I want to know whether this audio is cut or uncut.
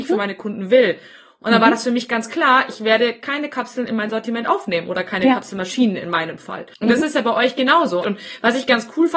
cut